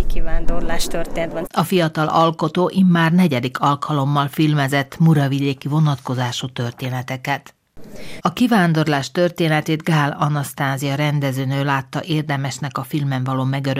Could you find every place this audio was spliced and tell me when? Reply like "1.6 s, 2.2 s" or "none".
1.5 s, 8.2 s